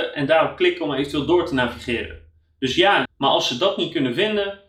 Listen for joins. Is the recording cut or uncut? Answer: cut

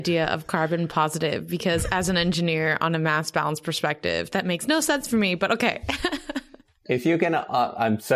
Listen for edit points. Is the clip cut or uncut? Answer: uncut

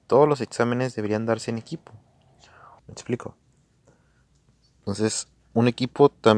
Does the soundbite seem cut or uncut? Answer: cut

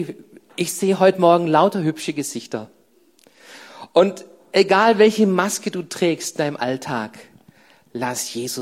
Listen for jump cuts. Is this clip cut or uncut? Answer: uncut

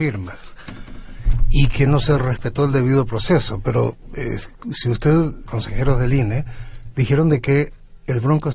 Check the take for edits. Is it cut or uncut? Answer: cut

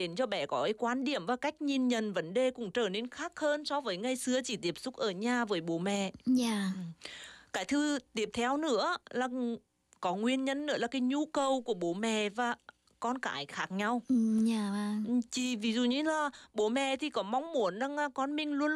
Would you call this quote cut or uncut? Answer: uncut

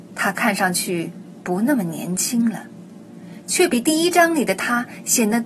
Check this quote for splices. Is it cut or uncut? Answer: uncut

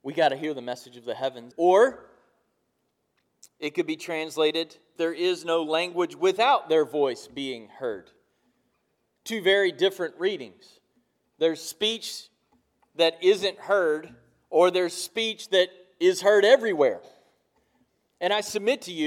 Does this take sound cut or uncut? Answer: cut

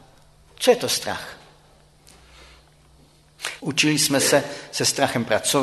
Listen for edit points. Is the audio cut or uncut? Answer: cut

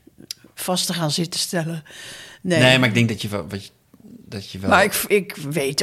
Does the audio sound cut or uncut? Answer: uncut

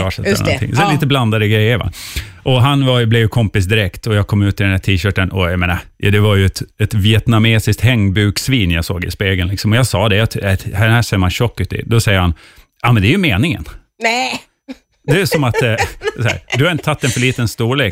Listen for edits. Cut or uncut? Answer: uncut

